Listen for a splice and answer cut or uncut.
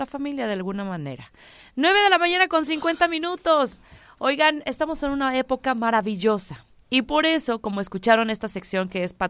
uncut